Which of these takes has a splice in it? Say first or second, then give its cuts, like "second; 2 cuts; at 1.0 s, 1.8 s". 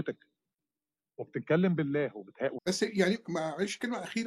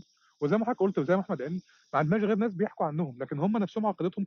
first; 1 cut; at 2.6 s